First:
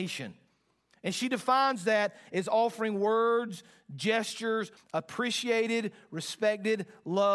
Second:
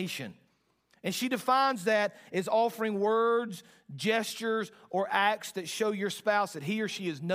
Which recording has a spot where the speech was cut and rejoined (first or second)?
first